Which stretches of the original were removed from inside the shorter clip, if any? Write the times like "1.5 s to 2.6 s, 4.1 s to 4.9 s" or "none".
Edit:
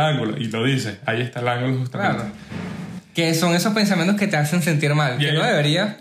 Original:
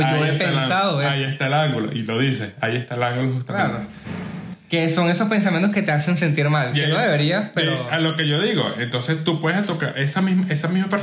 none